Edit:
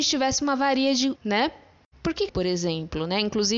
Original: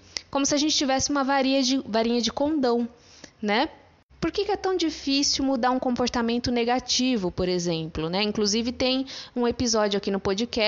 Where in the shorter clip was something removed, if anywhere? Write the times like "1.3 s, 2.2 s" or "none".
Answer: 1.2 s, 2.3 s